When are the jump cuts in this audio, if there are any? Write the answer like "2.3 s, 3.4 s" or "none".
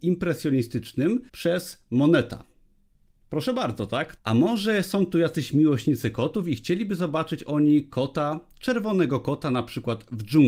1.3 s, 4.2 s

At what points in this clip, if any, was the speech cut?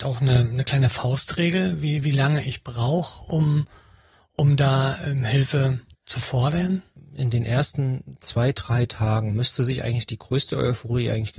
none

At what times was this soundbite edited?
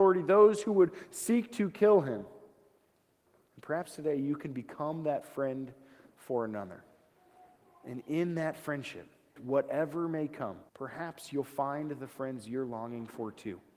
9.4 s, 10.7 s

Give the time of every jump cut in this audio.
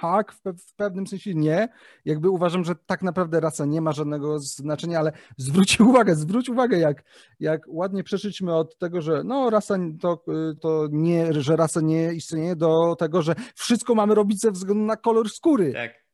10.6 s

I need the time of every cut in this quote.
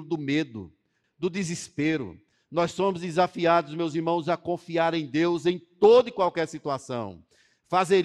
1.0 s, 2.3 s

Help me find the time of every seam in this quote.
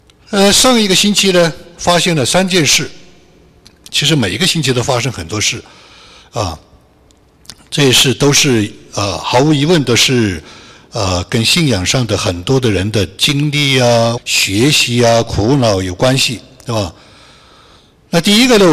14.2 s

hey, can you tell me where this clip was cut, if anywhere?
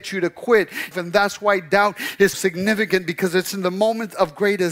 0.9 s, 2.3 s

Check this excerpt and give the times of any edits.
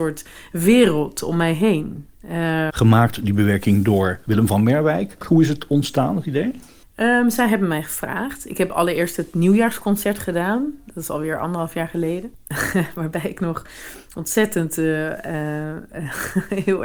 2.7 s

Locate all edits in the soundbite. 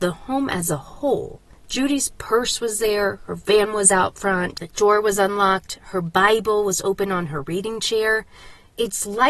4.6 s

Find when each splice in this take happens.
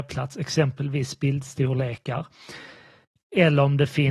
none

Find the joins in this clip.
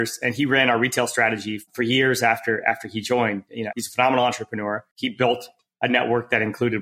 3.7 s, 4.9 s

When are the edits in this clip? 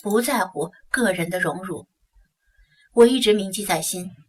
2.2 s

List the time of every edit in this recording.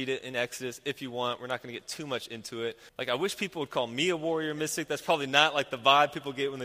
2.9 s

